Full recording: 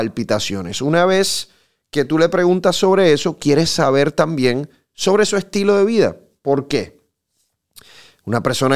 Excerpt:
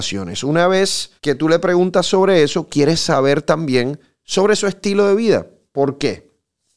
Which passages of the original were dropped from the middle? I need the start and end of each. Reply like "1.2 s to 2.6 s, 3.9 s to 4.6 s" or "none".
1.5 s to 1.9 s